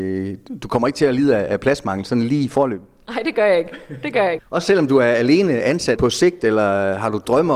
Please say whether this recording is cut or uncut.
cut